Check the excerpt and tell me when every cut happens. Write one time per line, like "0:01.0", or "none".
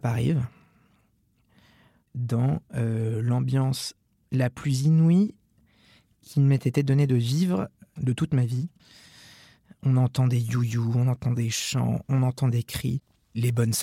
none